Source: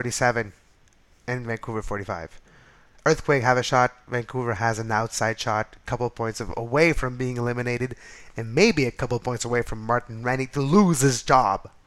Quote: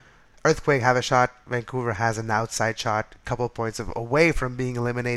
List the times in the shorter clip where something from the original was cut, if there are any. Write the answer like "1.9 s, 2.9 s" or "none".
none